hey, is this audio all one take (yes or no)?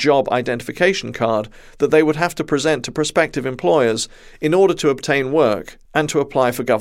yes